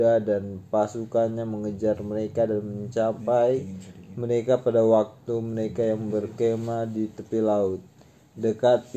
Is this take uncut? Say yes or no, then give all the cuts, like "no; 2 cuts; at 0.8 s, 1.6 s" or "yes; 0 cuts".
yes; 0 cuts